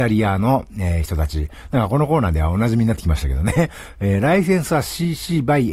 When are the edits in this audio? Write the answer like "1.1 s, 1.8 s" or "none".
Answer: none